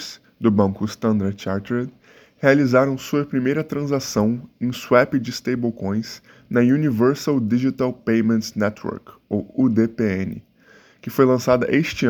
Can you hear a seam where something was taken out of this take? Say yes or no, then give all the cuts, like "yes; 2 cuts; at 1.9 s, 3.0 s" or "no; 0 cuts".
no; 0 cuts